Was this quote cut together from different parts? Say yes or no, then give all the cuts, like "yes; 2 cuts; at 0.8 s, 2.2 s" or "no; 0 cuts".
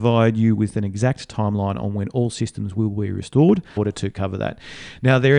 yes; 1 cut; at 3.8 s